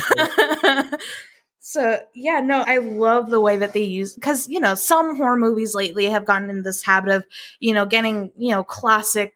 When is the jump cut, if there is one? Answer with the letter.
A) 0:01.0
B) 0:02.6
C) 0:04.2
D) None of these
B